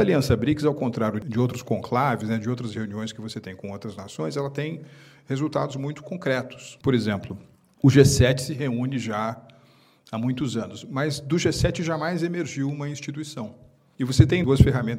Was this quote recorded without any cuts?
yes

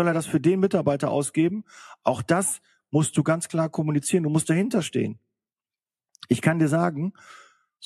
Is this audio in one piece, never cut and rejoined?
yes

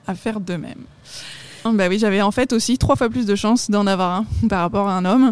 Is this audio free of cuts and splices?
no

